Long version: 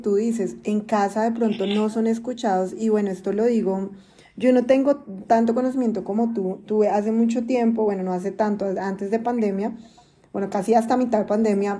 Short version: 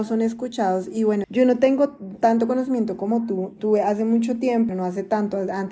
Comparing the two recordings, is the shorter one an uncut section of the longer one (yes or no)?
no